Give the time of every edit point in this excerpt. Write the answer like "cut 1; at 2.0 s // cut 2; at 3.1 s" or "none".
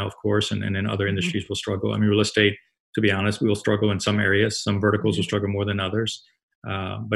none